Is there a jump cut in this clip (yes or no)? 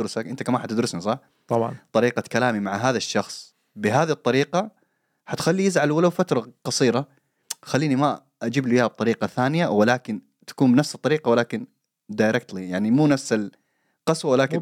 no